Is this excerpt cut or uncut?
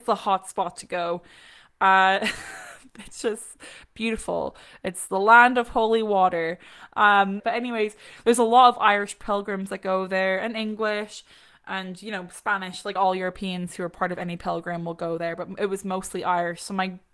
cut